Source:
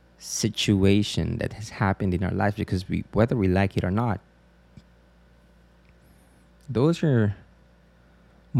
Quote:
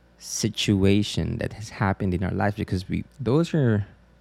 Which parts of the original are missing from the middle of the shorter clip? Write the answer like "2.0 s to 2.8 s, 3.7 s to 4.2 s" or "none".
3.1 s to 6.6 s